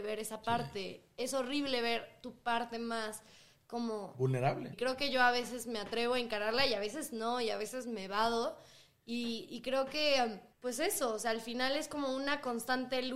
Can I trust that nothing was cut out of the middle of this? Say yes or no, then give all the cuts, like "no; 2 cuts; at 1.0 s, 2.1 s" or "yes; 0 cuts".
no; 2 cuts; at 4.7 s, 10.5 s